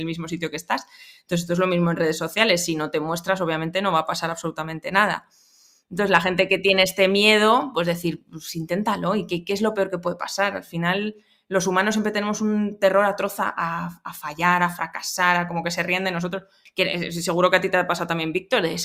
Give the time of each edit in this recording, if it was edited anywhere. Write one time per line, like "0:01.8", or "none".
0:16.7